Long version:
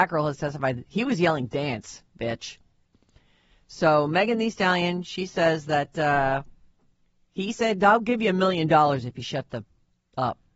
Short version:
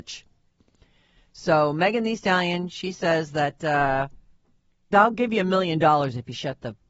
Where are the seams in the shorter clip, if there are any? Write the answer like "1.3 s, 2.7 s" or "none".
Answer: 4.9 s

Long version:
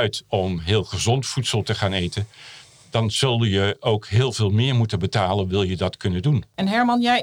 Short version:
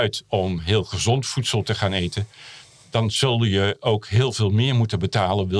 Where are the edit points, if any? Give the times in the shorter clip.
none

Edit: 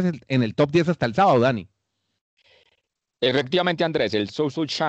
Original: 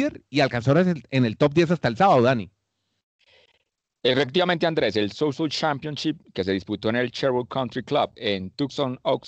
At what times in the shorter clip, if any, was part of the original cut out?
none

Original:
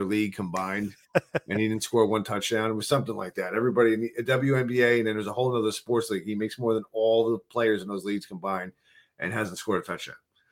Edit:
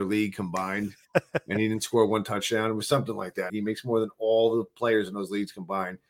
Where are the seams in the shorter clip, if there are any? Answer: 3.5 s

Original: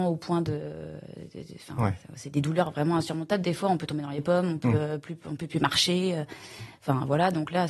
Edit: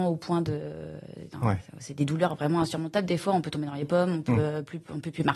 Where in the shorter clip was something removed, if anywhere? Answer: 1.3 s

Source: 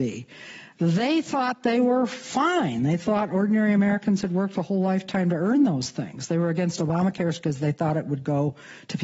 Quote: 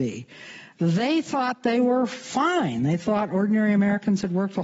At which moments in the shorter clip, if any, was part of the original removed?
none

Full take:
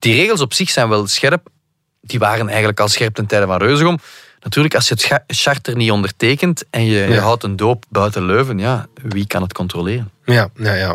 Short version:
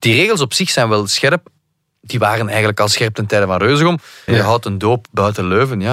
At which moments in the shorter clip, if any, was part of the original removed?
4.3 s

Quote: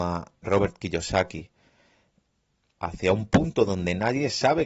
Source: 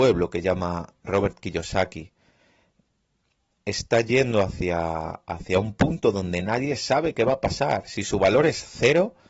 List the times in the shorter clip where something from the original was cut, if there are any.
2.8 s

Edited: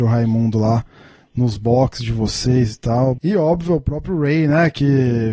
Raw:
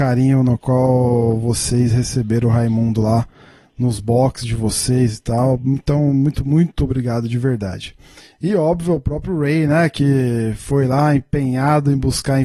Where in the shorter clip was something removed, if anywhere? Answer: 3.2 s

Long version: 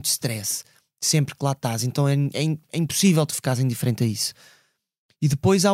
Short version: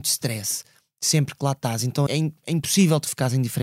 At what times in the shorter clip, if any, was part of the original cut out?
2.1 s

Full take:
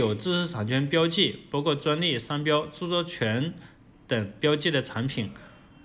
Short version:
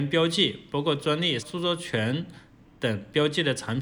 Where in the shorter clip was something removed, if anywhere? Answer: 1.4 s

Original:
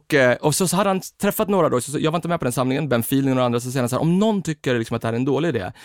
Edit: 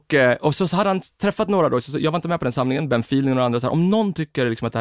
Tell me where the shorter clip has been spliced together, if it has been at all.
3.6 s

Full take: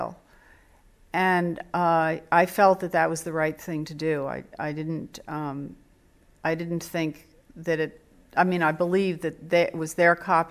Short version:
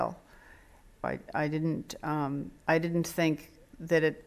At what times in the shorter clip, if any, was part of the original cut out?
1.0 s, 2.6 s

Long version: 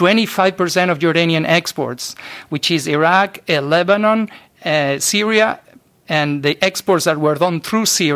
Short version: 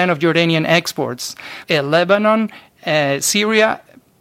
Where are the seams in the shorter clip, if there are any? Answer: 1.6 s

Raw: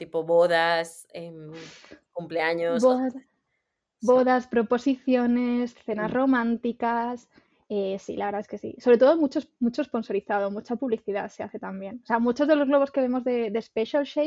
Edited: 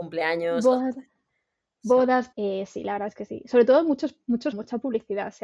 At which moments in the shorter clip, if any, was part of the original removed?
2.3 s, 4.5 s

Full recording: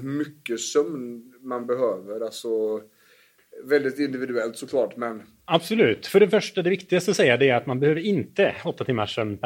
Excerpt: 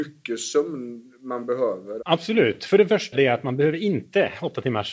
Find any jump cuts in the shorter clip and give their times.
2.0 s, 3.1 s

